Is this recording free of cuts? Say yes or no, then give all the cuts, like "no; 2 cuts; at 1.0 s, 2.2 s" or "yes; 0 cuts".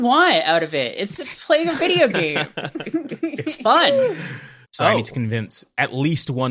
no; 1 cut; at 4.6 s